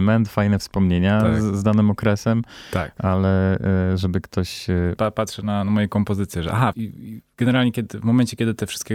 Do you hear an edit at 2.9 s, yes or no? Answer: no